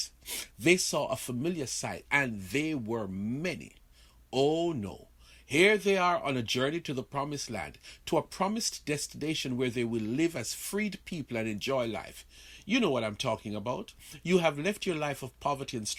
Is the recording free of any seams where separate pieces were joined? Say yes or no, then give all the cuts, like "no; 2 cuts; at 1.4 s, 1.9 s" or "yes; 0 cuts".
no; 1 cut; at 2.1 s